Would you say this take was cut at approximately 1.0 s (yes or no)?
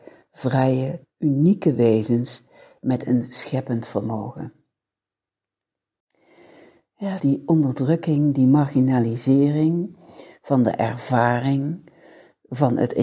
yes